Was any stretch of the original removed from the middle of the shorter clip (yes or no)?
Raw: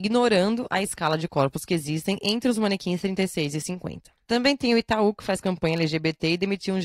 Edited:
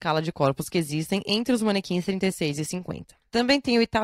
no